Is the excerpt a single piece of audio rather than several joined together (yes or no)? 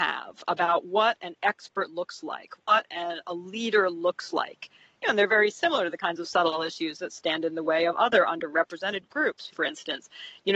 no